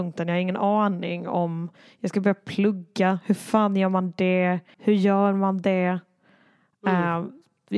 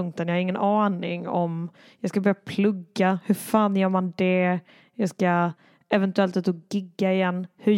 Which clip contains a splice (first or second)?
first